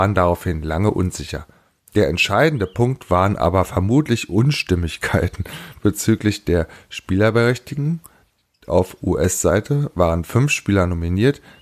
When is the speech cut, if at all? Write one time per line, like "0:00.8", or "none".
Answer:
none